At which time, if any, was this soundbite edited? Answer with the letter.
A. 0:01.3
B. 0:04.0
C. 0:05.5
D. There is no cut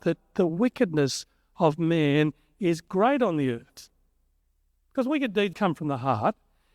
C